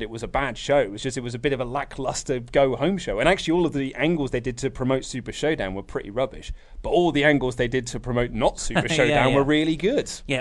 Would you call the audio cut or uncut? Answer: uncut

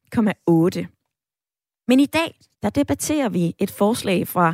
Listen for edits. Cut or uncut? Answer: cut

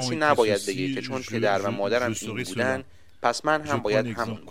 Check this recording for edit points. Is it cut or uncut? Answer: uncut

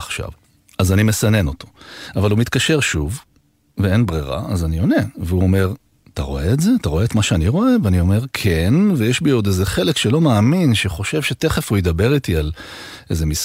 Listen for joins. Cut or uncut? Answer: uncut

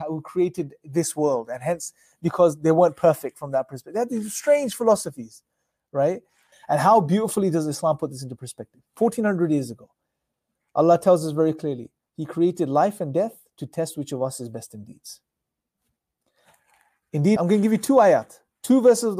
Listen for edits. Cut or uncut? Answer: cut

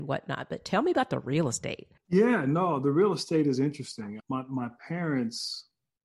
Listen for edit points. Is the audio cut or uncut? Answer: cut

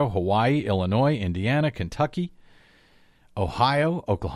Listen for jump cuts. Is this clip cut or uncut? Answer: uncut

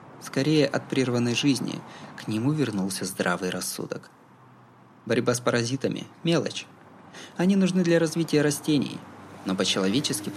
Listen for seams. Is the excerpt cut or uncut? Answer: uncut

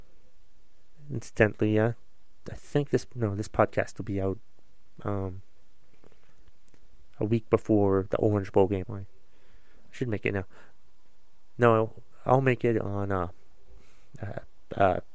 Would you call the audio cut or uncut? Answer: cut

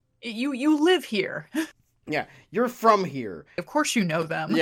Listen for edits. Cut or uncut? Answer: cut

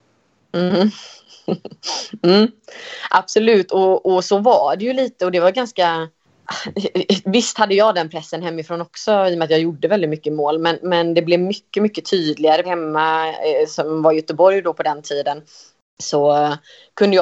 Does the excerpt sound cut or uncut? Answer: cut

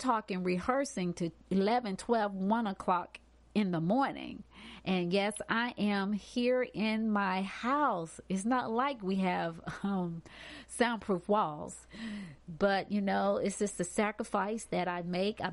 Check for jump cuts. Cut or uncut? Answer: uncut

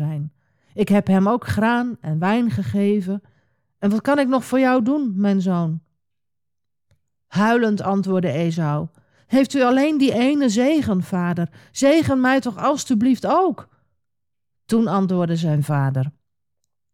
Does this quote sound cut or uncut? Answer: uncut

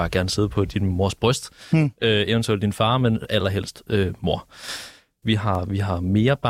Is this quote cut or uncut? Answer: cut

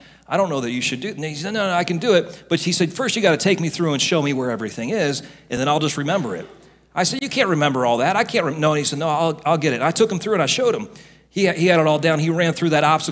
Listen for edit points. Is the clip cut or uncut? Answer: uncut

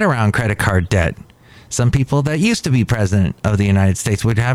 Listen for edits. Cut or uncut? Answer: uncut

